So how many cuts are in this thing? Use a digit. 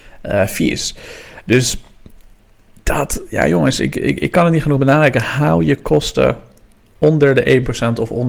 0